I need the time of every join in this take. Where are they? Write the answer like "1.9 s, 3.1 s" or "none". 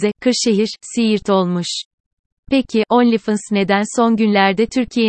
none